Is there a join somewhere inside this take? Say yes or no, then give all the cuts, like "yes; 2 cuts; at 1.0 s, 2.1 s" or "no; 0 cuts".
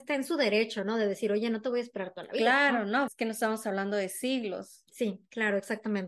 yes; 1 cut; at 3.1 s